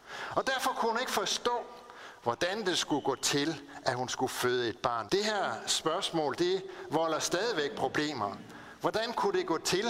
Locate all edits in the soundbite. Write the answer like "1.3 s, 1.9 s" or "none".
5.1 s

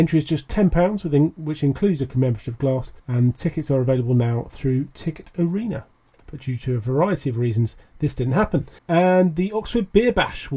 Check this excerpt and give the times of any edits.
3.0 s, 6.2 s, 8.8 s

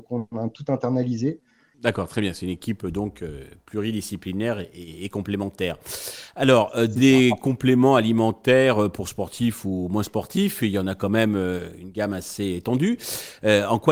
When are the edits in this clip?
1.7 s

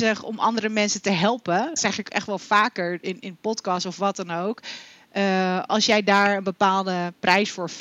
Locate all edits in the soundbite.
1.8 s

